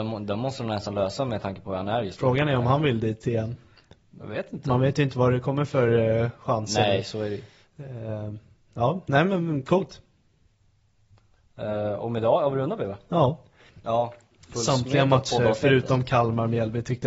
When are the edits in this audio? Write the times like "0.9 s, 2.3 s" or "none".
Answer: 13.7 s